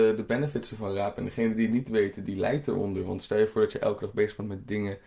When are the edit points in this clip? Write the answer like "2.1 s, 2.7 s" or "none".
none